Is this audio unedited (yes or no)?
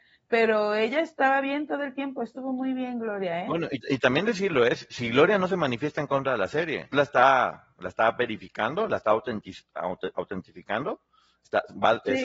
no